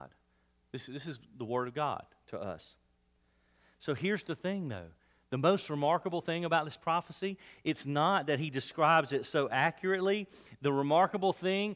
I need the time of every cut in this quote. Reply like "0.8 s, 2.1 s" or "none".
none